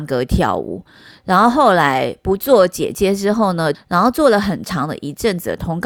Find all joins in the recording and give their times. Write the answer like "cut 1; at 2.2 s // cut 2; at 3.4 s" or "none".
cut 1; at 3.7 s